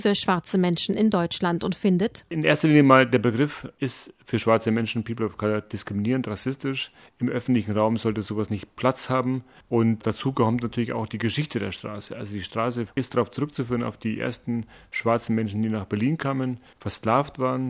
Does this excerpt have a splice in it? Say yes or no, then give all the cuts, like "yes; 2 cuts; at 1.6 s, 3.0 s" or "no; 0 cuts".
no; 0 cuts